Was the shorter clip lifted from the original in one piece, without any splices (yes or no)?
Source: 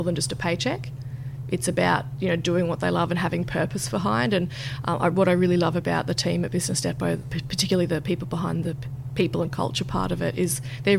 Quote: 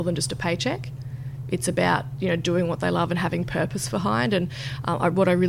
yes